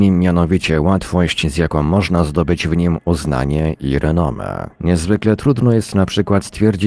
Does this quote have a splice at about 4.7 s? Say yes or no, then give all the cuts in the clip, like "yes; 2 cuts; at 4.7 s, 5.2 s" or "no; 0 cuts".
yes; 1 cut; at 4.7 s